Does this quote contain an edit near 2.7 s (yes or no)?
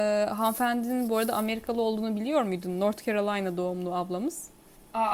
no